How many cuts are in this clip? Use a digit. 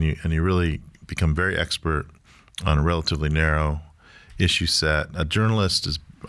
0